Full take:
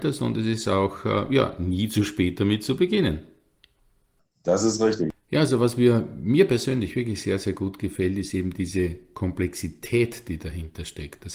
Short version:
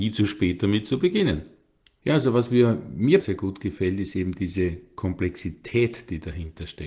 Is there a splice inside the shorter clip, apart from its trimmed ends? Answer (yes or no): yes